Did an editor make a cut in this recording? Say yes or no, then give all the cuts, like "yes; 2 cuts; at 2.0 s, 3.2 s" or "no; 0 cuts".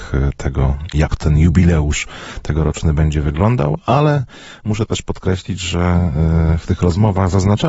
no; 0 cuts